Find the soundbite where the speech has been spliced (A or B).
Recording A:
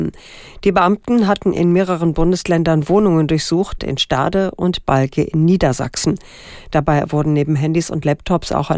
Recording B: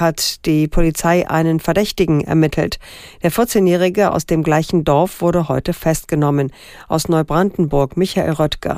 A